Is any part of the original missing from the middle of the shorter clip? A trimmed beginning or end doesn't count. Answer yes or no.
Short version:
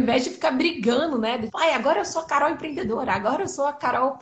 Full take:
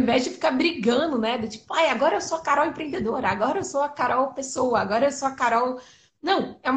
yes